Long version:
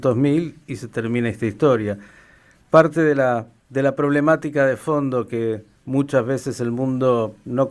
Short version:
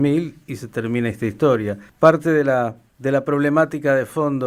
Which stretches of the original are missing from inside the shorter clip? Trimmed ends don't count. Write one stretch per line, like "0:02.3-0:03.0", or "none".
0:02.1-0:02.6